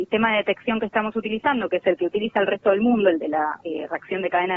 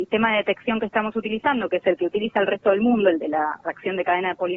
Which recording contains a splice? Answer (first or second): second